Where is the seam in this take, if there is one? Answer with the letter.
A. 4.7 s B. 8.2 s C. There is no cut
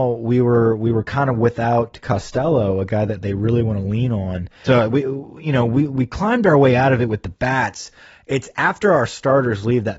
A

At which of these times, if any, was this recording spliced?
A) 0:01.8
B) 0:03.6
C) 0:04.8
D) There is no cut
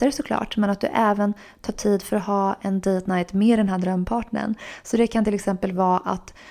D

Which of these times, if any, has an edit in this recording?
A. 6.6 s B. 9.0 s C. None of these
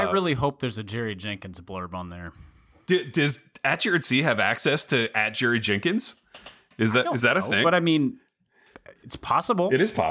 B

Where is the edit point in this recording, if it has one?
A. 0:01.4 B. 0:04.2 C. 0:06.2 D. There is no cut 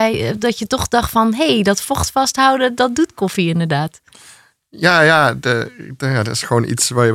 D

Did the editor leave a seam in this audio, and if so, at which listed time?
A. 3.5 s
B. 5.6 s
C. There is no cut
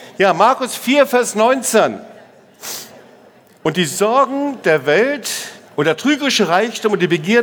B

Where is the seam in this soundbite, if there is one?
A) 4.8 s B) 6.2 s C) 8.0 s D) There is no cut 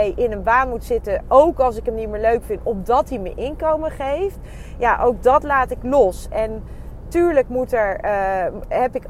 D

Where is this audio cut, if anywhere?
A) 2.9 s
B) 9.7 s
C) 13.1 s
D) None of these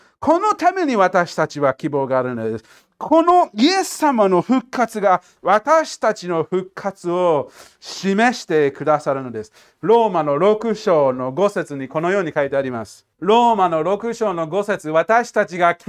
C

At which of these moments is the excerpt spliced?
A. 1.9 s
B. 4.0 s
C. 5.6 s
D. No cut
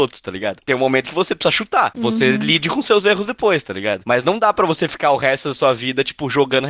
A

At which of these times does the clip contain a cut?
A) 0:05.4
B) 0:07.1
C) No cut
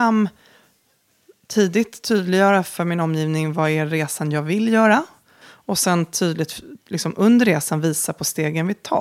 A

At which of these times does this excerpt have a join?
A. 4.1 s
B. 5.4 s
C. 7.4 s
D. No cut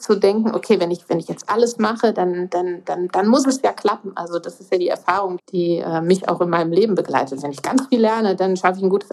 B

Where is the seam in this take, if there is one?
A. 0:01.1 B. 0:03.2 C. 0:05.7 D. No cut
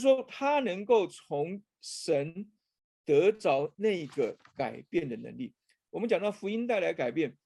D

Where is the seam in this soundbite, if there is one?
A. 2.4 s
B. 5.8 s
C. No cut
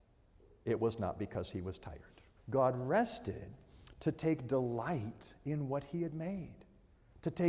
A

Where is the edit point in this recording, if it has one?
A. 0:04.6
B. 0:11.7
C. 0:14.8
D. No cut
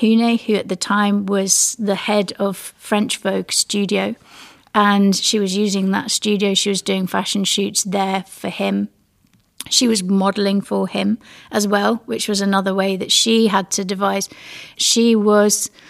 C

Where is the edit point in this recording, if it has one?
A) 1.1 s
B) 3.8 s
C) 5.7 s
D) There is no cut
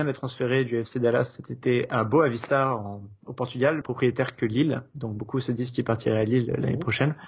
B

